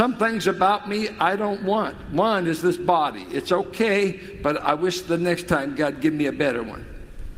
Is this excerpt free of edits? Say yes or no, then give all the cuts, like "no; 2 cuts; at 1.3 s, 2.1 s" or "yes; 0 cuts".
yes; 0 cuts